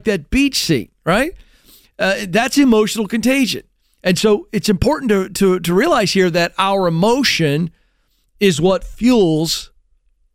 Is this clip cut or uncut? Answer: uncut